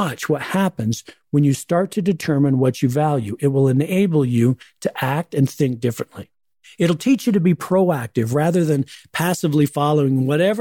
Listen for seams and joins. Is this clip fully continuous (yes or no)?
yes